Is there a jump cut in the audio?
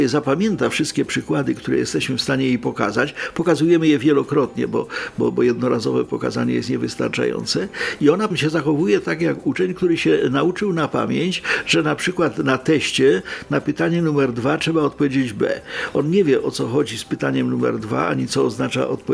yes; 1 cut; at 8.3 s

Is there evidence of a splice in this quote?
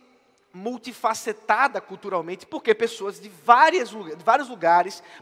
yes; 1 cut; at 2.5 s

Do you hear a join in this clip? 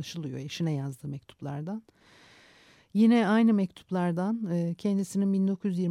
no; 0 cuts

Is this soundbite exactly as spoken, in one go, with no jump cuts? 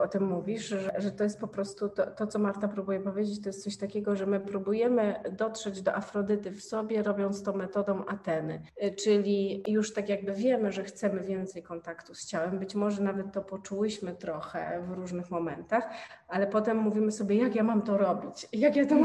yes; 0 cuts

